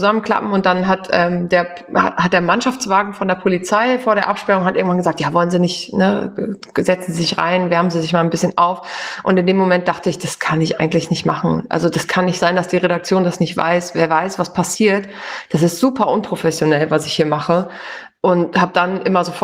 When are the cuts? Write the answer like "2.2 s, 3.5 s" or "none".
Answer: none